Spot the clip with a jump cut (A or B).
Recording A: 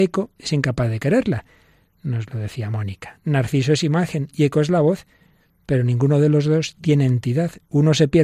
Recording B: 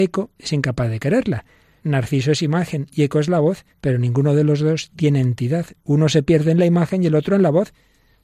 B